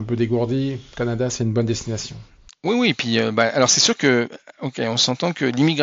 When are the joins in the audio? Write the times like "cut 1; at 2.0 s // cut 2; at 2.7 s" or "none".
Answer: none